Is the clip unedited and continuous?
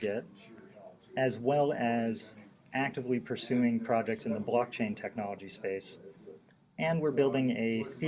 yes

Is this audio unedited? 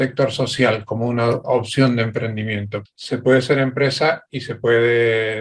no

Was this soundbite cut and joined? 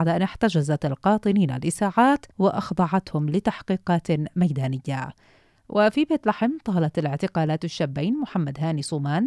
yes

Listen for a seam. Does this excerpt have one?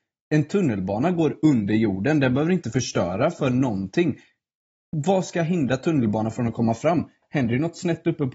yes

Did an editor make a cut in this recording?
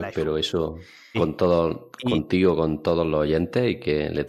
yes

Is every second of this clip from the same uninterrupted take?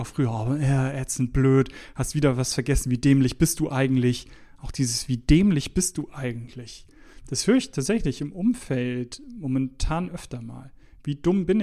yes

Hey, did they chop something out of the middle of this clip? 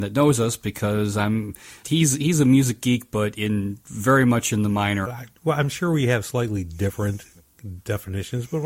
yes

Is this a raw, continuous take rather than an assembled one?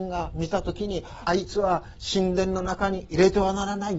no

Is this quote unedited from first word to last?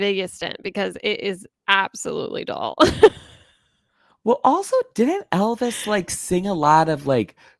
yes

